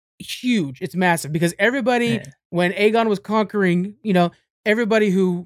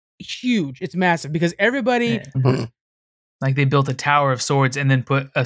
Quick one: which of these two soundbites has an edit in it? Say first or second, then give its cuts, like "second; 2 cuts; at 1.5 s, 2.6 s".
second; 1 cut; at 2.3 s